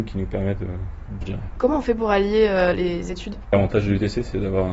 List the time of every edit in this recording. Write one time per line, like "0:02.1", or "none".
0:01.2
0:02.7